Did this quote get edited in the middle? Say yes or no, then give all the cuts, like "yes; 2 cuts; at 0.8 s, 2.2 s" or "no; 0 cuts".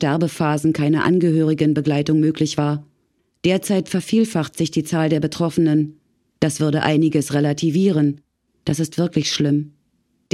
yes; 2 cuts; at 6.3 s, 8.5 s